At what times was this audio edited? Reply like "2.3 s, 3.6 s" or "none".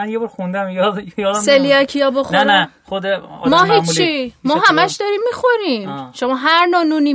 none